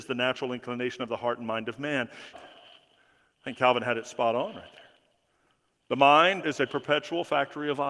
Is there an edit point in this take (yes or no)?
yes